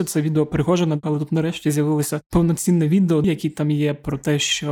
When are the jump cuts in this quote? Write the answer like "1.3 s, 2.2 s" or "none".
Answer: 1.0 s, 3.2 s